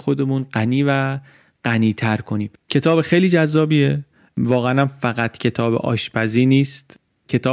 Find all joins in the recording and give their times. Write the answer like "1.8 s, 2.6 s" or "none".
2.6 s